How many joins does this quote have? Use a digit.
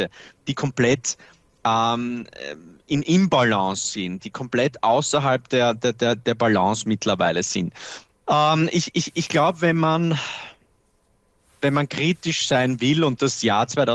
1